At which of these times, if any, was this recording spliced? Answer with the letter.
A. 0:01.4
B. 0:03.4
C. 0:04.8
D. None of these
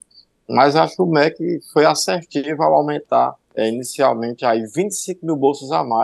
B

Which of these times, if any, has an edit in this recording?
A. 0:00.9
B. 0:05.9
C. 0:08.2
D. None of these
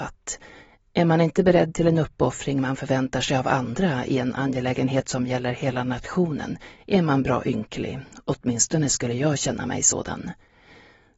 D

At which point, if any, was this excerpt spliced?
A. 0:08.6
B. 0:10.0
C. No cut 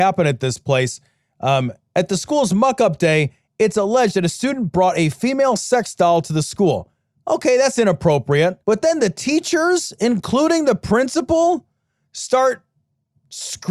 A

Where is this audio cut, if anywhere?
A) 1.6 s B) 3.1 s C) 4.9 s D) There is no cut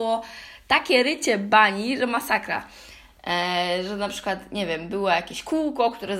B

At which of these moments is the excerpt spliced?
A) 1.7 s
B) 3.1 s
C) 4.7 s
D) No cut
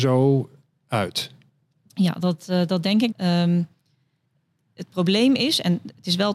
B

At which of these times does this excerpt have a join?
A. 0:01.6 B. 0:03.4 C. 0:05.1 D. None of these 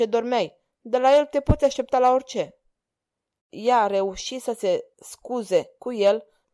B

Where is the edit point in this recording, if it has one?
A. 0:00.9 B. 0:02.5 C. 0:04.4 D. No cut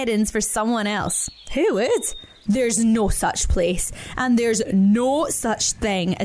B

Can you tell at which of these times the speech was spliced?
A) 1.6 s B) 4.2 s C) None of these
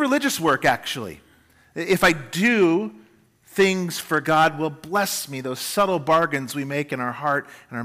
B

